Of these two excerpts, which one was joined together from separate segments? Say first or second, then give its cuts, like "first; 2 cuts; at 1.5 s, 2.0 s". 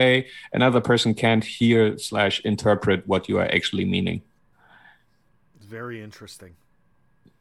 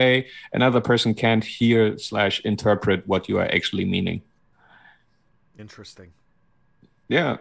second; 1 cut; at 5.6 s